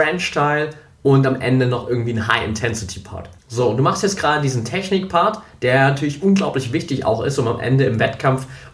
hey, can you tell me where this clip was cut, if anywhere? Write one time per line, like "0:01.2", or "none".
0:03.4